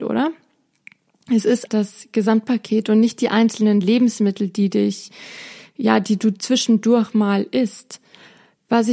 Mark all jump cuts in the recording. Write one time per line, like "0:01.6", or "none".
0:01.7